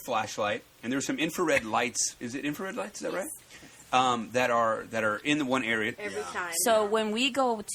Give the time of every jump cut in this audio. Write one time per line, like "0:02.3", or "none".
0:06.0